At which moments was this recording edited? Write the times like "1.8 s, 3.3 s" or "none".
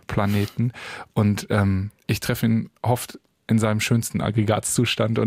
2.0 s